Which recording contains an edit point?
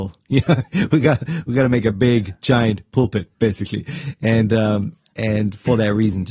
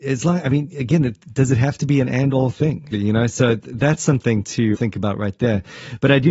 second; 2 cuts; at 2.9 s, 4.7 s

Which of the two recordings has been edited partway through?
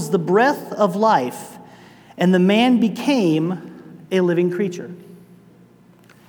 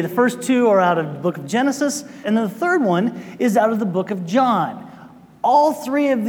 second; 1 cut; at 2.2 s

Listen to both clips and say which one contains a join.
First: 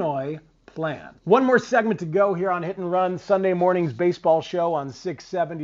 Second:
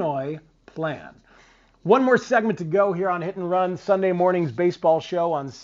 first; 1 cut; at 1.2 s

